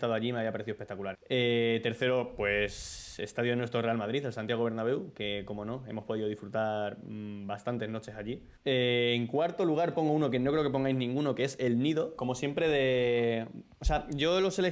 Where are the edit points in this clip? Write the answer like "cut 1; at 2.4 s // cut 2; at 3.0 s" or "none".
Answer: cut 1; at 1.1 s // cut 2; at 8.6 s // cut 3; at 12.2 s

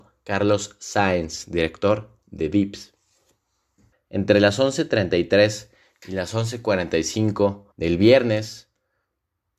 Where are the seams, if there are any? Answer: cut 1; at 3.9 s // cut 2; at 7.7 s

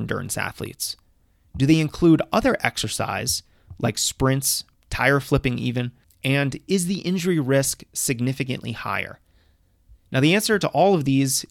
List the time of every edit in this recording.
cut 1; at 4.7 s // cut 2; at 6.0 s

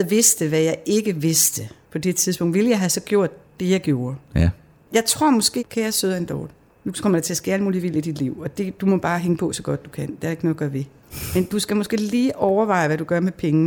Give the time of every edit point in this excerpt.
cut 1; at 5.6 s

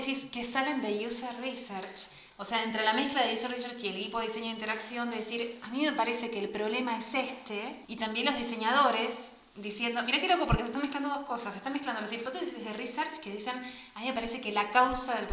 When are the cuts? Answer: cut 1; at 7.8 s

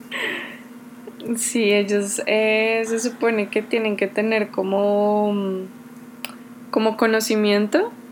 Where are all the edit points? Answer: none

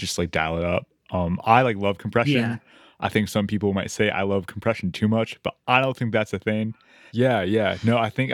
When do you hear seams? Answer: cut 1; at 7.1 s

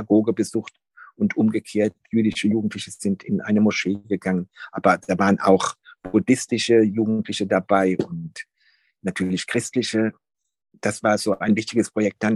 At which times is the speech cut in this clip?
none

